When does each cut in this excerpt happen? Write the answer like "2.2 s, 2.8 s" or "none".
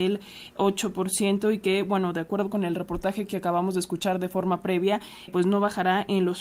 5.3 s